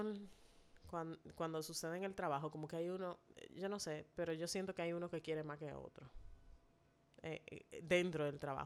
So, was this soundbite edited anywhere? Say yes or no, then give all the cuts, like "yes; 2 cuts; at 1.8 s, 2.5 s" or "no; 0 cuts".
no; 0 cuts